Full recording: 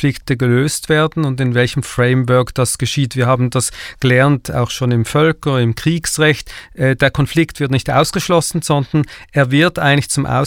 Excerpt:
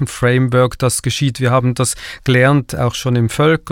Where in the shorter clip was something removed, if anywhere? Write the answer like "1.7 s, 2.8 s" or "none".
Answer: none